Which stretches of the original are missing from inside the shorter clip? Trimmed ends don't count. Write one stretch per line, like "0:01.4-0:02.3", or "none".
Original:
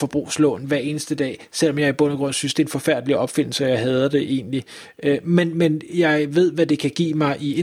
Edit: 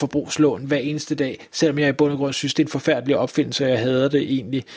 none